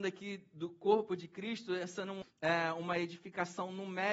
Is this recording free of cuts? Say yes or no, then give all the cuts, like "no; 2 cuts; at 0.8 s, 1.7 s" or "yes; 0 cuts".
no; 1 cut; at 2.2 s